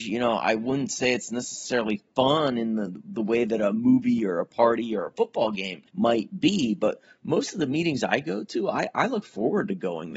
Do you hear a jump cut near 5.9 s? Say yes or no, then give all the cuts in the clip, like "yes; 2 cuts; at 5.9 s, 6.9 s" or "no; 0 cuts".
yes; 1 cut; at 5.9 s